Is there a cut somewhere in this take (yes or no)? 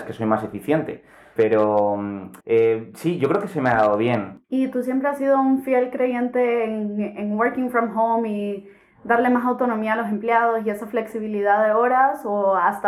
yes